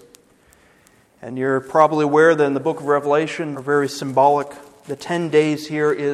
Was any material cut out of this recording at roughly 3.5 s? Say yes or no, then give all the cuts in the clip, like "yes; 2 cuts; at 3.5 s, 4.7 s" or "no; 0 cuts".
yes; 1 cut; at 3.5 s